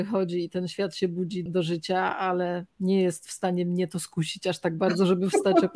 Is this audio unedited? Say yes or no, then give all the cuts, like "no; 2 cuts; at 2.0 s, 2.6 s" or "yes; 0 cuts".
no; 1 cut; at 1.5 s